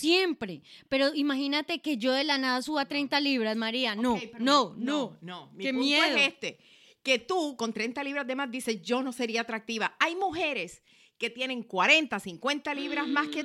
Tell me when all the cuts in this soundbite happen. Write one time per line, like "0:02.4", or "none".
none

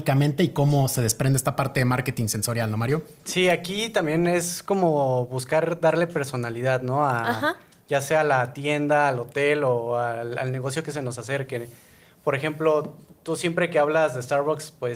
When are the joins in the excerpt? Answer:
none

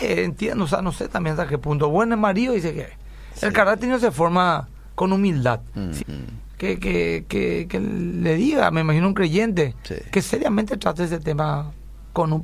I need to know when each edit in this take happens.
0:06.0

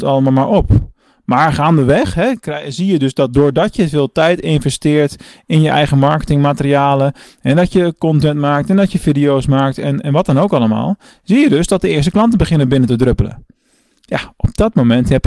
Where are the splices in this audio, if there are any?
none

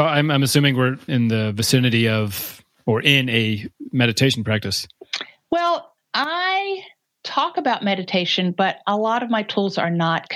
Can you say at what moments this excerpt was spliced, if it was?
0:01.1

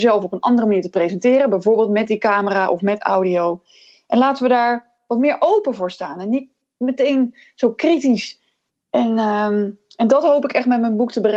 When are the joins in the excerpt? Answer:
none

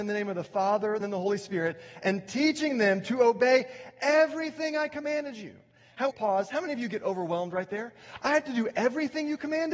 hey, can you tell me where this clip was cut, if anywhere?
0:01.0
0:06.1

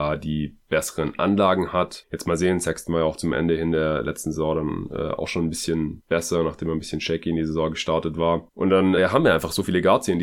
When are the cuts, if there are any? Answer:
0:09.0

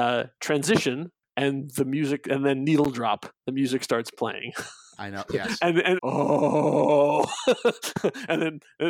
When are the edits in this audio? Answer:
0:06.0

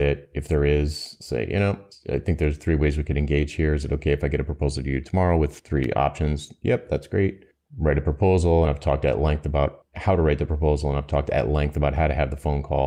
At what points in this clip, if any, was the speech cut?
none

